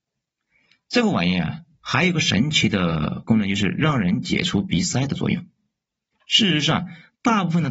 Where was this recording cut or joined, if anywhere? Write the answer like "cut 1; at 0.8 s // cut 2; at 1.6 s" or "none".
none

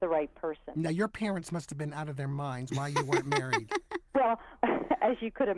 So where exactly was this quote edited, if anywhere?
cut 1; at 4.6 s

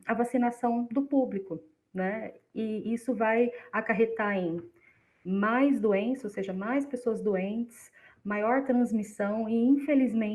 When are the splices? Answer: none

